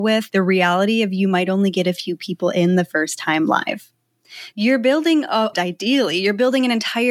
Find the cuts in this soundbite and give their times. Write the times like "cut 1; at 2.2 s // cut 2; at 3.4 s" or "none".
cut 1; at 4.5 s // cut 2; at 5.5 s